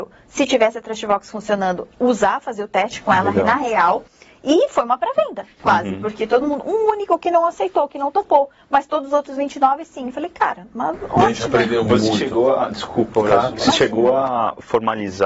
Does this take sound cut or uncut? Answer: uncut